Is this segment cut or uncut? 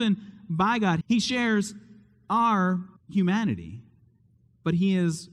cut